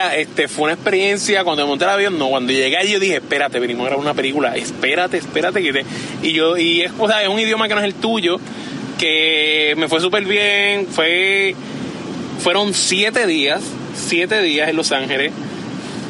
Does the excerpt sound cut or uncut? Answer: uncut